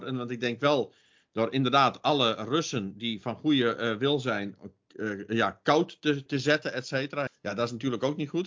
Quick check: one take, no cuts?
no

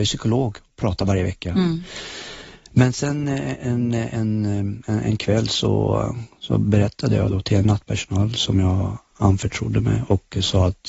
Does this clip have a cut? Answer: no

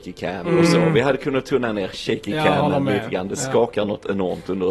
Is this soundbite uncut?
yes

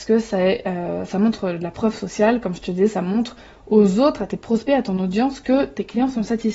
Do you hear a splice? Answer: no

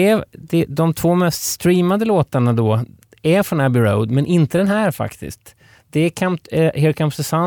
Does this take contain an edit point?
no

